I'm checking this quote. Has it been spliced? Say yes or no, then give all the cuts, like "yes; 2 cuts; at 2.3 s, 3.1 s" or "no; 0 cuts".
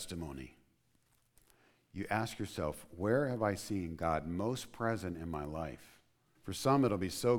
yes; 1 cut; at 6.4 s